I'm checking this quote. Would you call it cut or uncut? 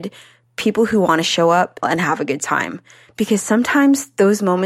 cut